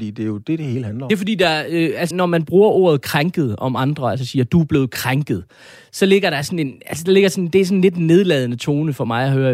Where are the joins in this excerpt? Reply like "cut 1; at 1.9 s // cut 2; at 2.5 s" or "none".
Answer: cut 1; at 2.1 s